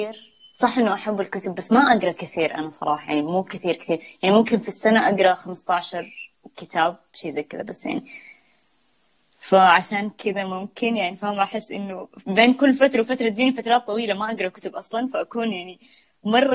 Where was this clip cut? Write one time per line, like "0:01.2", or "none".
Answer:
none